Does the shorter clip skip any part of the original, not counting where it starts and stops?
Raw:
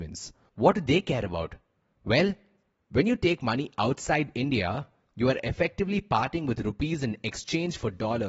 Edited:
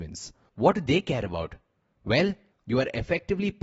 yes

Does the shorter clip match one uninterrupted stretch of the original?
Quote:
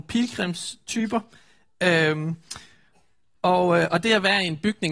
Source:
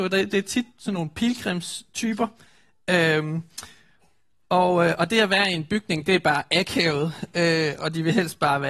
yes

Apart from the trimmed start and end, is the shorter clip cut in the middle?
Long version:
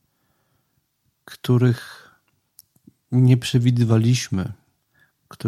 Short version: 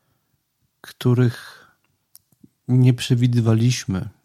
no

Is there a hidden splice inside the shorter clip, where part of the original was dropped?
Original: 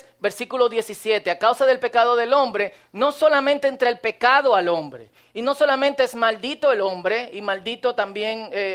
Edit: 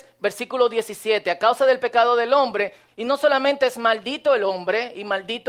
yes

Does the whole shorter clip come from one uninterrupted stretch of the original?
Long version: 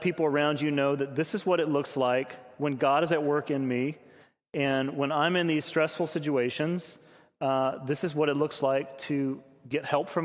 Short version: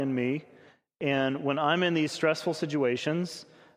yes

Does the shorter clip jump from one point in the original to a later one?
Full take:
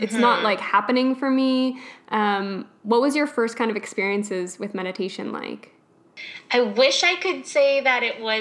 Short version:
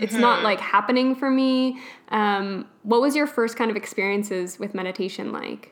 no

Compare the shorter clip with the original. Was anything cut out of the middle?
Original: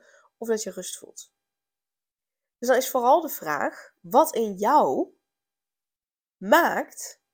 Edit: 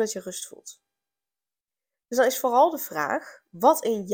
no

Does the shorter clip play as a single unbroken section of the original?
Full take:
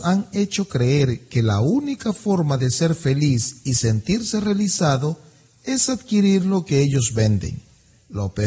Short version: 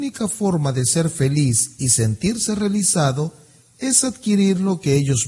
yes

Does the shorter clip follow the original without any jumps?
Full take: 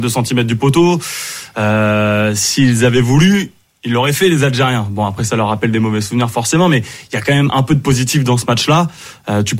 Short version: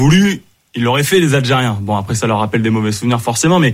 yes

